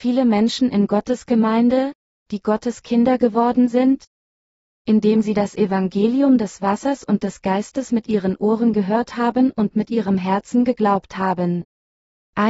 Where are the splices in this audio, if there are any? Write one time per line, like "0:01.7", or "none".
none